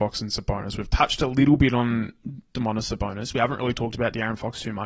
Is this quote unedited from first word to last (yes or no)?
yes